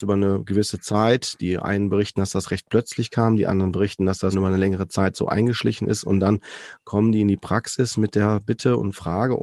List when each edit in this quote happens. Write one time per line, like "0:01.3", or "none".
0:04.3